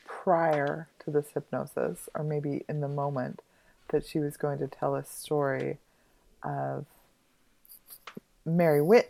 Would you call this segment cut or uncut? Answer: uncut